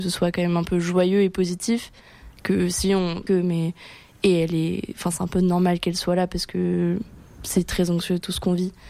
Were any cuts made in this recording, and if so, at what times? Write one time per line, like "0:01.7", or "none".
0:03.3

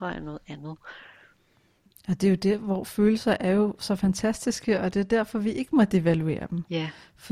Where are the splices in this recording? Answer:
none

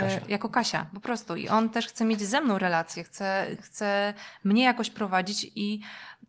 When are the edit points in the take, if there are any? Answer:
none

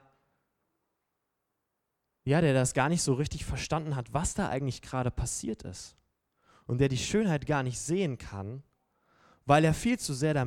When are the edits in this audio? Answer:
none

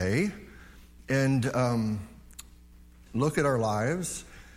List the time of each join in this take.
0:03.1

